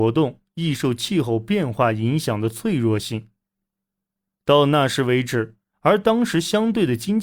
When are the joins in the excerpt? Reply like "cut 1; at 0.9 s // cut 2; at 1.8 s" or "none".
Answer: cut 1; at 5.6 s